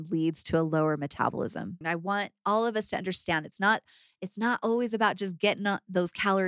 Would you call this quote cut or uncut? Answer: cut